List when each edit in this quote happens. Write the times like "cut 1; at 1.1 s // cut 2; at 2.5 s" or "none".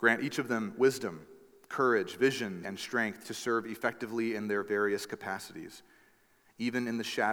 cut 1; at 2.6 s